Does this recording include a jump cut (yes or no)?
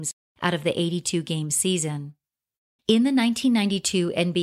yes